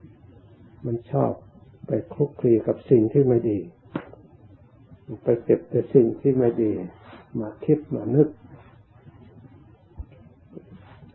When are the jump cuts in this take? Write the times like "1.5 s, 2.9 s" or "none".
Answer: none